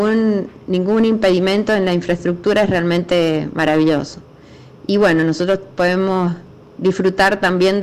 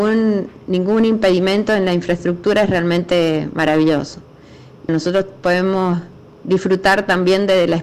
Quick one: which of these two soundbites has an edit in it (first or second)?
second